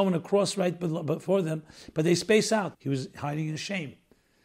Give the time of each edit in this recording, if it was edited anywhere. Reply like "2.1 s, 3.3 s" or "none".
2.7 s